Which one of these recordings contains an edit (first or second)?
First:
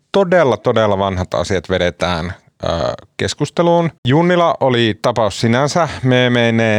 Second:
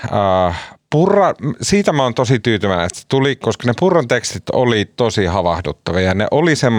first